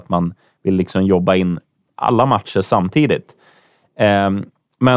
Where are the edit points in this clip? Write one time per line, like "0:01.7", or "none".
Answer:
none